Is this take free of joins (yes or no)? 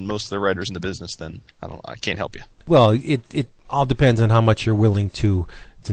no